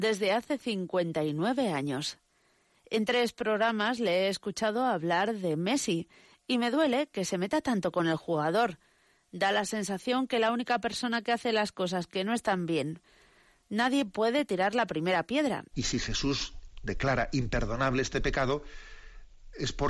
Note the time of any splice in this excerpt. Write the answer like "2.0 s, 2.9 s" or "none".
15.7 s